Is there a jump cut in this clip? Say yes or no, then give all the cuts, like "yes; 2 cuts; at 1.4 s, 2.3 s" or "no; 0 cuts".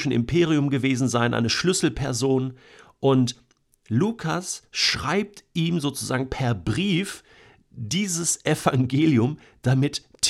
no; 0 cuts